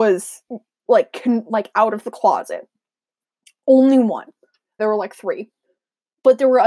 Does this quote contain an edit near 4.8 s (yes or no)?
yes